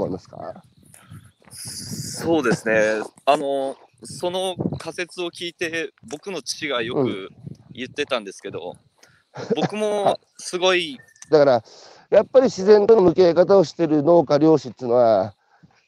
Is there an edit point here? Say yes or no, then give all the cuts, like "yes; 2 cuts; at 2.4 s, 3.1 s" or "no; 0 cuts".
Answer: yes; 1 cut; at 11.3 s